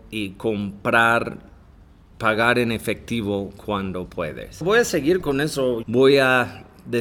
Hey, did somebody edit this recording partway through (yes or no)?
yes